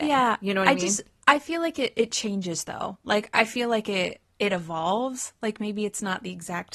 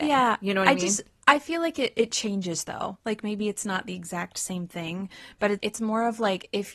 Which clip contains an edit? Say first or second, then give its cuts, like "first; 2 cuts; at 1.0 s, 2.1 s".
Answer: second; 2 cuts; at 3.0 s, 5.6 s